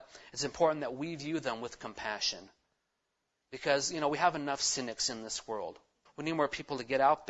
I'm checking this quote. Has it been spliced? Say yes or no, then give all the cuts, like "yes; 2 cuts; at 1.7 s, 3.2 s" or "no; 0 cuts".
yes; 1 cut; at 6.1 s